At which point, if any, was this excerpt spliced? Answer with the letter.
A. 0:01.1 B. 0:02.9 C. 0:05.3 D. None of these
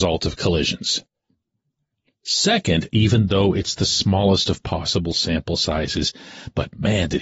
B